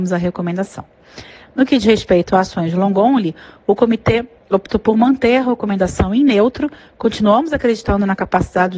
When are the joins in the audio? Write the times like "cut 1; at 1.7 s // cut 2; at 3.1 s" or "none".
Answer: cut 1; at 1.5 s